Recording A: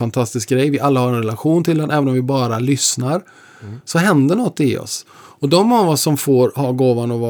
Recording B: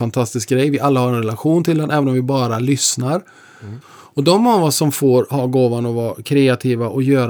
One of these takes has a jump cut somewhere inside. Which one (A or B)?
B